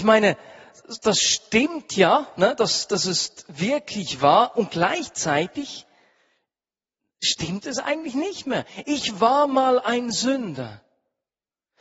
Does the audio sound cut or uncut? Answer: uncut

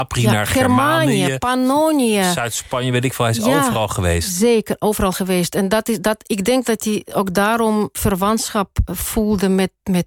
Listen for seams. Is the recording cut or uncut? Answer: uncut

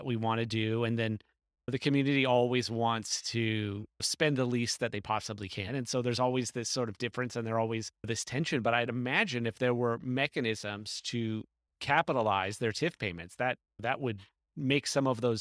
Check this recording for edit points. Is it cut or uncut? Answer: cut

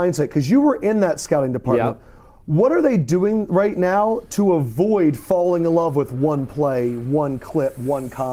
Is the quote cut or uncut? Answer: uncut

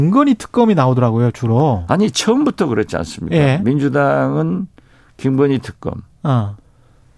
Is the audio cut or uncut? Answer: uncut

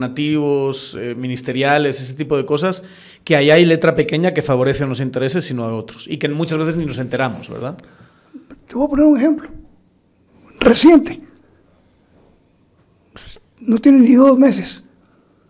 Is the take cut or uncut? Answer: uncut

